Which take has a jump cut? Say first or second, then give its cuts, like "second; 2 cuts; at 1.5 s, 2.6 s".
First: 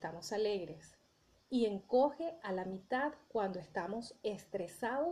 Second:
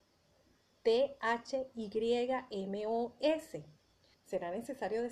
second; 1 cut; at 4.1 s